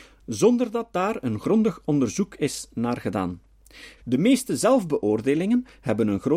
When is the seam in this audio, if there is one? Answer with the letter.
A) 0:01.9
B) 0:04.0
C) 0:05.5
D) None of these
B